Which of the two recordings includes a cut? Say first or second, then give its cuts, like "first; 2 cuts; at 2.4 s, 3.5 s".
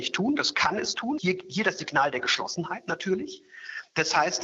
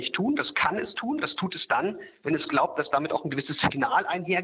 first; 1 cut; at 1.2 s